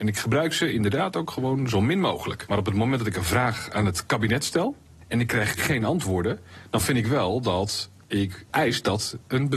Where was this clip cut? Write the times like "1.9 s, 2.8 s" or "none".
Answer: 8.5 s